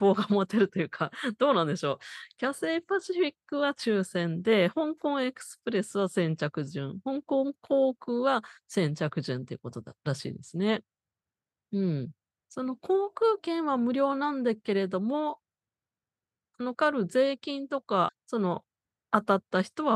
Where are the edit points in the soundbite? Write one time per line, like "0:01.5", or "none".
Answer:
0:16.7
0:18.1